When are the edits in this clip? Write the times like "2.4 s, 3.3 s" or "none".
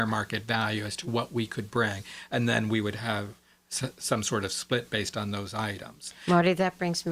none